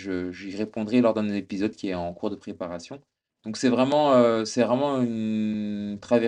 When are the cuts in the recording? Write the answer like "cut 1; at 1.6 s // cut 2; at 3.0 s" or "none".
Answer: cut 1; at 3.3 s